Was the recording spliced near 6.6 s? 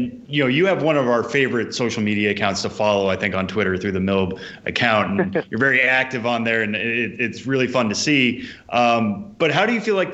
no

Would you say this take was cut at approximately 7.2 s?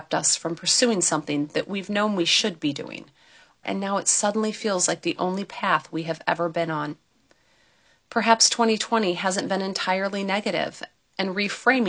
no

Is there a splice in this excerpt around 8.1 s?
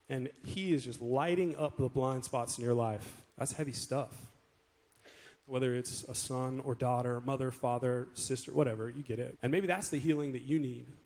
no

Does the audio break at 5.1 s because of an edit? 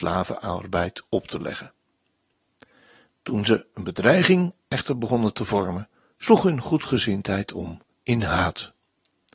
no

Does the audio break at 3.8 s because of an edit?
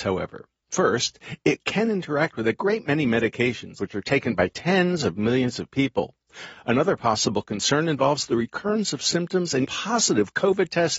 yes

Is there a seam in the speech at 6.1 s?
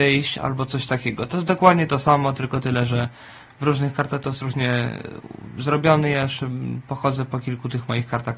no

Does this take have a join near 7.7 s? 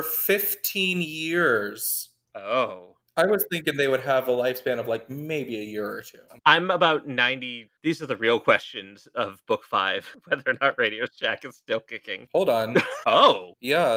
yes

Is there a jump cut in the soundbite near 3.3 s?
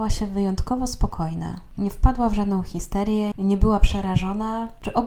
yes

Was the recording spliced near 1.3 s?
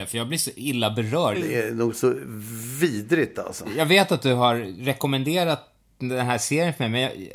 yes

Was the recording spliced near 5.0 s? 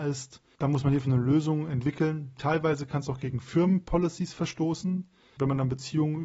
no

